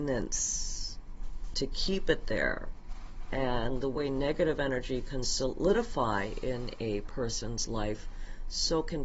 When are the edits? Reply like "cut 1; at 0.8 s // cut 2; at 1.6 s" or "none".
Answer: cut 1; at 1.5 s